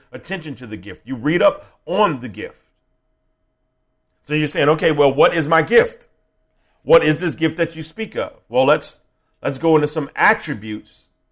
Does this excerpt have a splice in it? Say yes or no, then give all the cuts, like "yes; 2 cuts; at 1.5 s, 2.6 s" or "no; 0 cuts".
no; 0 cuts